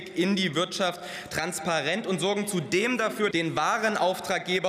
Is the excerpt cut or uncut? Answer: cut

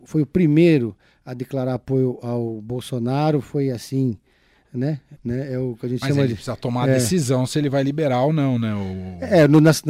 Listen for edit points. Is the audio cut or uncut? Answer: cut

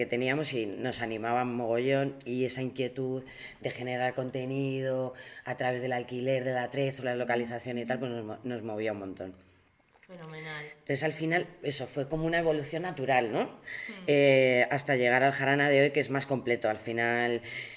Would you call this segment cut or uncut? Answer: uncut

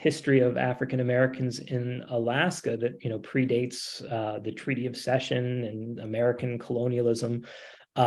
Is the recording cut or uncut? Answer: uncut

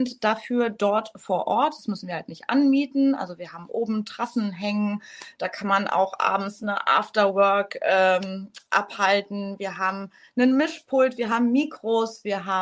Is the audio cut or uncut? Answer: uncut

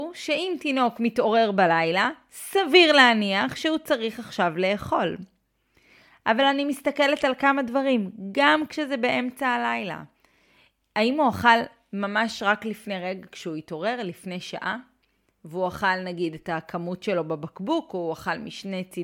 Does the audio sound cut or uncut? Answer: uncut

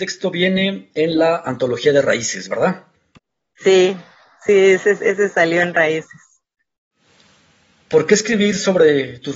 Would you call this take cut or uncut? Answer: uncut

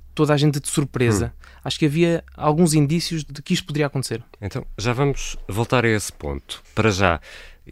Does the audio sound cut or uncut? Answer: uncut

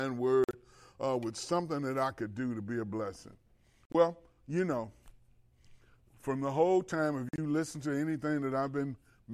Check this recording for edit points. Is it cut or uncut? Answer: uncut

